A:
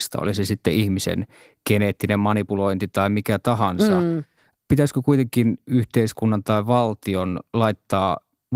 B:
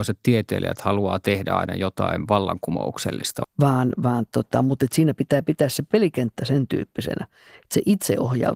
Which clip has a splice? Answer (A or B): B